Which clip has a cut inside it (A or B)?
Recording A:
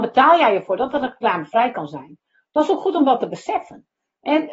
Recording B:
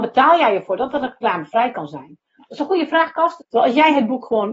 B